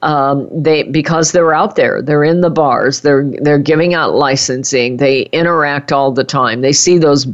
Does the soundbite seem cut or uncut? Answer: uncut